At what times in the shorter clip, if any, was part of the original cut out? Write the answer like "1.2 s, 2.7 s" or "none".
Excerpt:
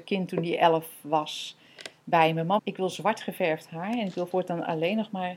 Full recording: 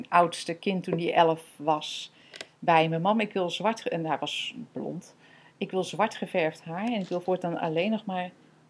2.6 s